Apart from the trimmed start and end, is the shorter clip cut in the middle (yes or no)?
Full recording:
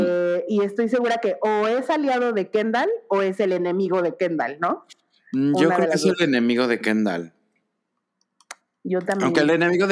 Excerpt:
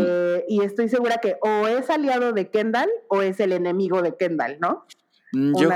no